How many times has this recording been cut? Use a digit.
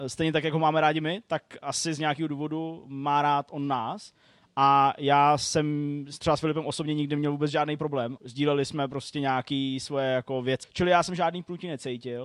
2